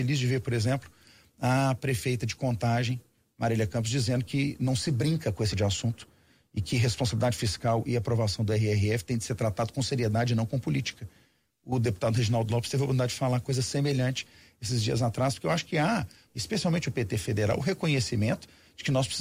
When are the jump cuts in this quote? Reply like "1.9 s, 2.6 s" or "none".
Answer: 5.5 s, 16.3 s